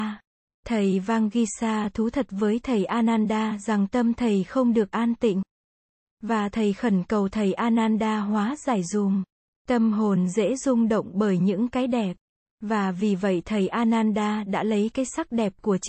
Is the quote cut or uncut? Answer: cut